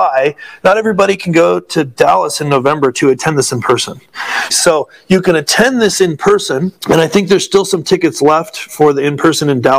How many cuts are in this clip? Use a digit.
2